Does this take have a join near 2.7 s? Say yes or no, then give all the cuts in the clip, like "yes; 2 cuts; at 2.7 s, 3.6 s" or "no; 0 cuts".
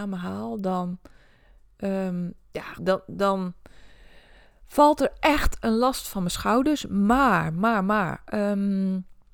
yes; 1 cut; at 2.7 s